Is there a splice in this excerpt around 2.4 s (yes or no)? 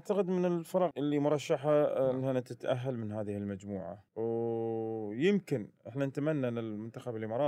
no